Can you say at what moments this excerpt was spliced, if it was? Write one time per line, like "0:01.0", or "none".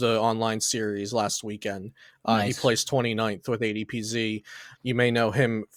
0:04.7